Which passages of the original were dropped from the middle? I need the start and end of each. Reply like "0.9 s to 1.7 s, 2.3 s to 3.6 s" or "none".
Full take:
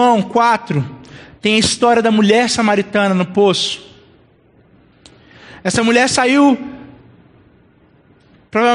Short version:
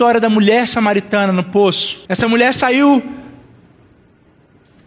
3.9 s to 5.6 s